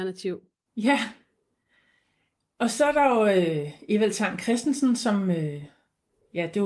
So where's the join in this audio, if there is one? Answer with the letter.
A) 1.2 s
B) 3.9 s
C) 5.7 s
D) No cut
D